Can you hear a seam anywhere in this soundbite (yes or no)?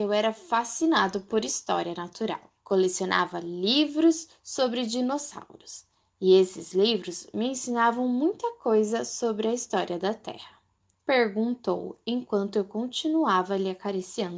yes